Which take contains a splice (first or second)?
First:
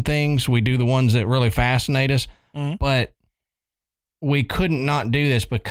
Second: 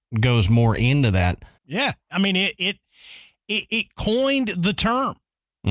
second